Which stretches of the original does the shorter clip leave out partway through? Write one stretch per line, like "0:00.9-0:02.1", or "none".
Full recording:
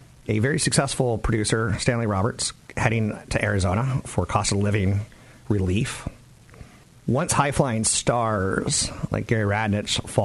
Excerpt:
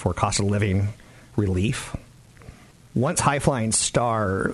none